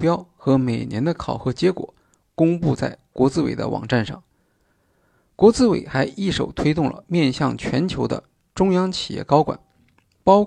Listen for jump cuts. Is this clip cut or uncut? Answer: uncut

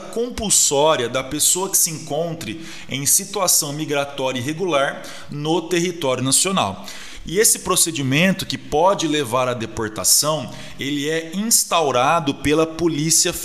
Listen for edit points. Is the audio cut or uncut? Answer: uncut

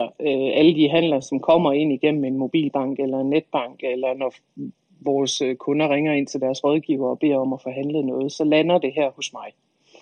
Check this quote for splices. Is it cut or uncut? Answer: uncut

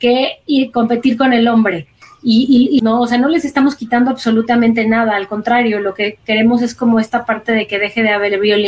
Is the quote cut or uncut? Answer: cut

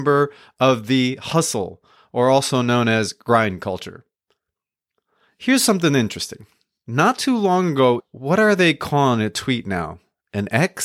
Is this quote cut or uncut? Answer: cut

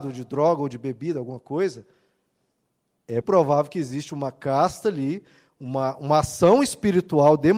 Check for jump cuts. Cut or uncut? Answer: cut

